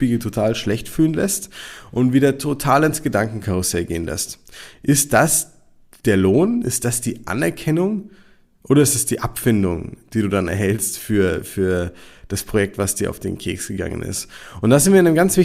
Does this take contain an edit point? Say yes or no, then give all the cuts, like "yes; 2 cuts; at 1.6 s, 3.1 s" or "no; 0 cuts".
no; 0 cuts